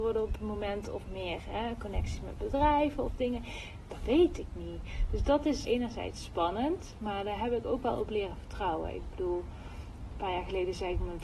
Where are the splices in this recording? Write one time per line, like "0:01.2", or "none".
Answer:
0:05.6

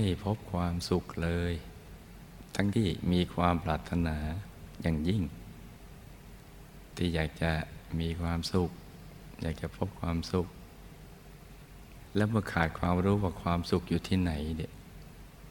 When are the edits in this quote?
0:02.7

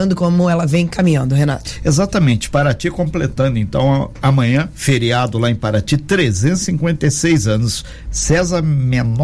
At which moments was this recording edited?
0:08.1

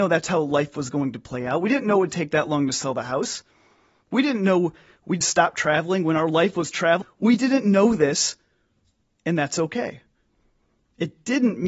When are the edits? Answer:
0:05.2
0:07.0

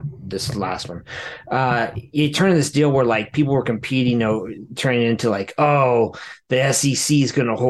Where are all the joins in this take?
none

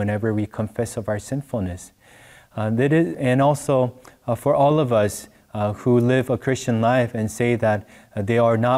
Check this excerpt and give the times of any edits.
0:03.1

